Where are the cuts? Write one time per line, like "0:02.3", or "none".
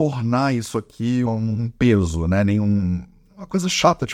0:01.3

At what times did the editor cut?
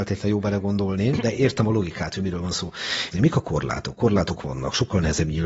0:03.1

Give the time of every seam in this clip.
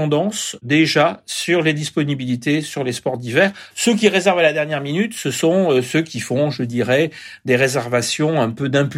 0:03.7

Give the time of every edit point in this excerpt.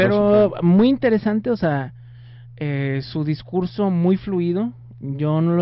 none

